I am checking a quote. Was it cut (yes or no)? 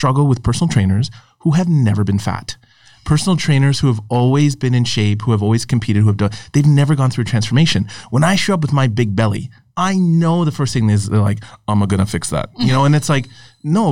no